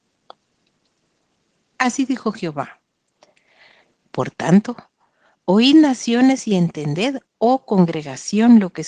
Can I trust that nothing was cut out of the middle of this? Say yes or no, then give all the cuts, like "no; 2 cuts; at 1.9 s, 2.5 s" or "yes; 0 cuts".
no; 1 cut; at 4.0 s